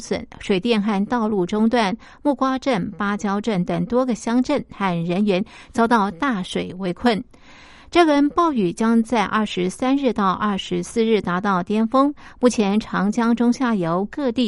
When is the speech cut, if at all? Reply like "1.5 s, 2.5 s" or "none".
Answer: none